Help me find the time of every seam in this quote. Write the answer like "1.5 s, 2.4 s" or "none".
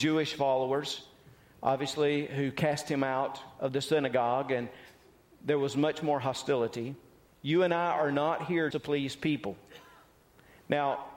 7.3 s, 8.7 s